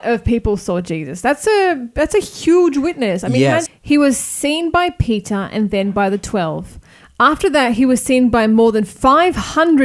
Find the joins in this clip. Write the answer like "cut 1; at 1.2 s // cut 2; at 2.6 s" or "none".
cut 1; at 3.7 s